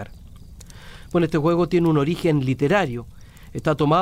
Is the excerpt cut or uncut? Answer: uncut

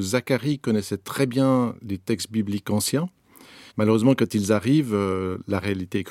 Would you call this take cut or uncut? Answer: cut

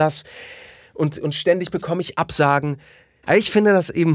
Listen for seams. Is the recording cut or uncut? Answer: cut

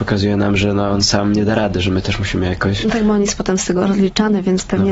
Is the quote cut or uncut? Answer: uncut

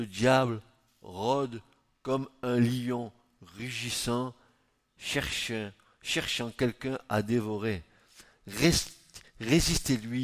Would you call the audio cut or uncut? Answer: uncut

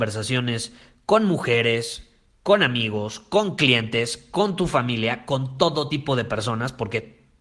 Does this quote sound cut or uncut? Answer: uncut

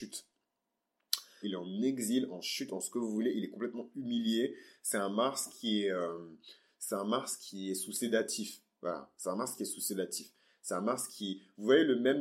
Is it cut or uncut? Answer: cut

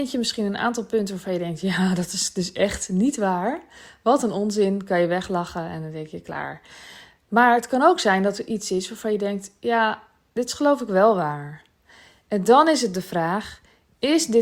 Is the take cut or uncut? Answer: uncut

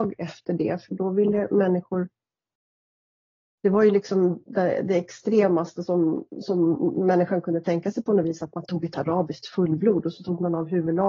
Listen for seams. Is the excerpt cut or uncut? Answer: uncut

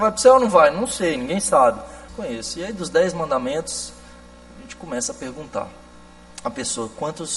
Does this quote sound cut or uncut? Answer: cut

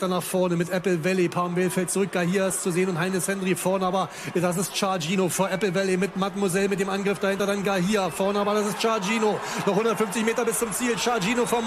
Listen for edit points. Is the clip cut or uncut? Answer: uncut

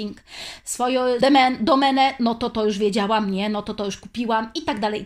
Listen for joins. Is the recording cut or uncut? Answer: cut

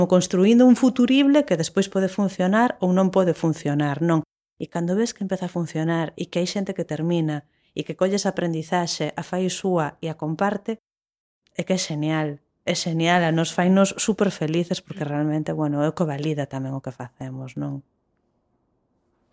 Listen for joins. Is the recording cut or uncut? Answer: uncut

